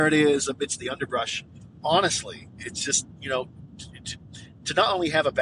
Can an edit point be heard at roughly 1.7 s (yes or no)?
yes